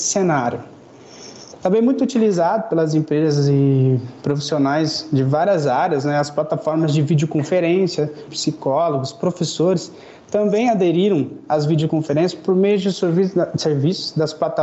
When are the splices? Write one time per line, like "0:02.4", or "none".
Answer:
0:08.3

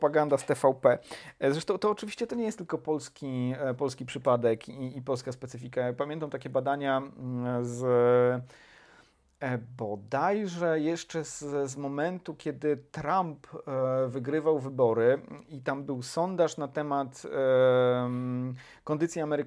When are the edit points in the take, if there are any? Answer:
none

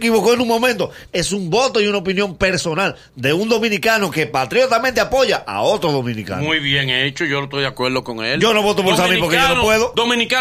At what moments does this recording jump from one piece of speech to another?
0:01.1

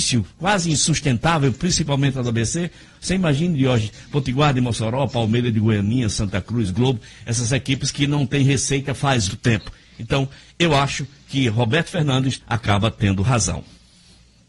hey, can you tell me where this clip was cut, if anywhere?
0:09.3
0:12.4

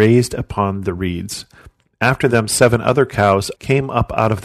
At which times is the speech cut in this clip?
0:03.6

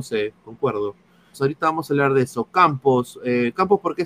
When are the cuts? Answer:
0:01.3

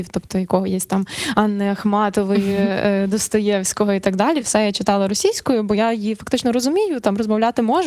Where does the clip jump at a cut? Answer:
none

